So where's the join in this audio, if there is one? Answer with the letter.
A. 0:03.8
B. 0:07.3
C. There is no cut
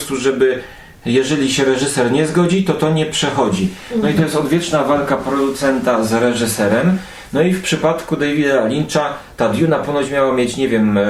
C